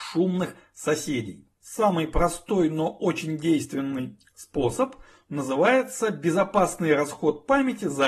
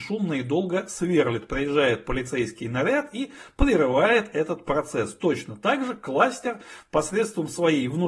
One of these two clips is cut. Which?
first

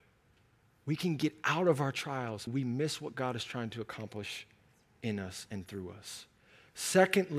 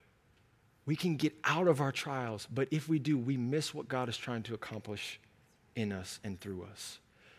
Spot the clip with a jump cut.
first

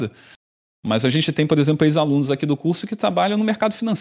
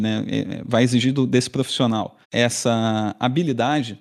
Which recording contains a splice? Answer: second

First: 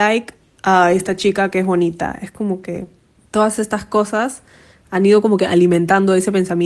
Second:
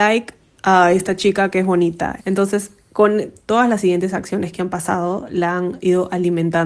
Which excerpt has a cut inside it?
second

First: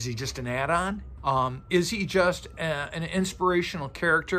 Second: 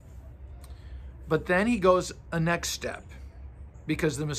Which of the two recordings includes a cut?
first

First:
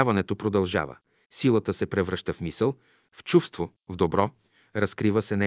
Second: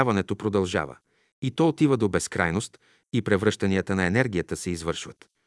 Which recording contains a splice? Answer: first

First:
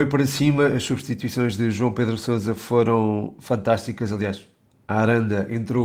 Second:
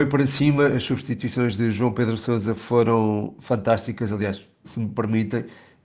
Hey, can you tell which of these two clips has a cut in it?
second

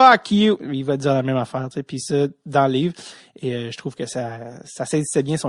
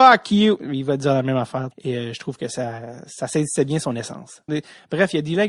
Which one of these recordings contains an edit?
second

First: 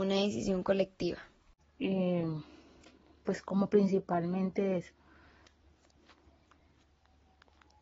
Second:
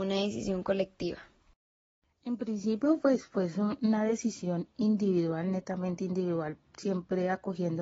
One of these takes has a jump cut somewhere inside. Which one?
first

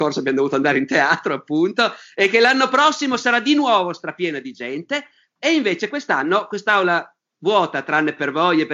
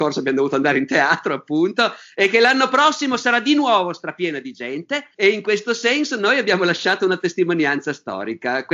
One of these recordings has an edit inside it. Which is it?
second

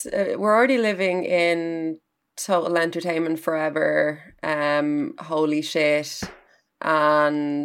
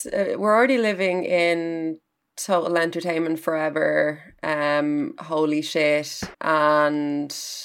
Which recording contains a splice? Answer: second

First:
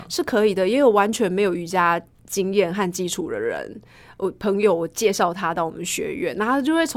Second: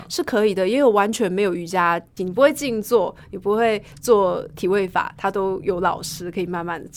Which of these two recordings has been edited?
second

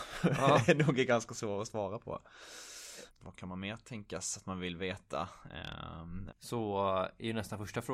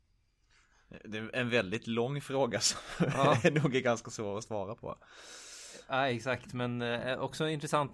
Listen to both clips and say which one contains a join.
first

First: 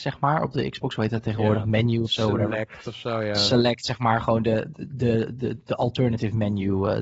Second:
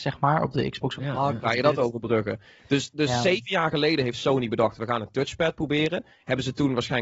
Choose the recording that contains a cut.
second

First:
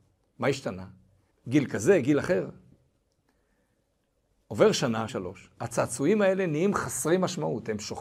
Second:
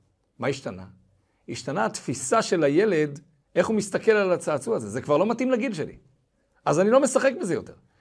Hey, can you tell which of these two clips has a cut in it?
first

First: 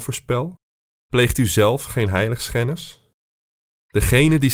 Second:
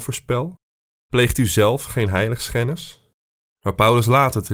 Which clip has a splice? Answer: second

